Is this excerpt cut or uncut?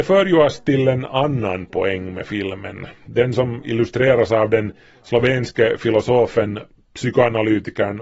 uncut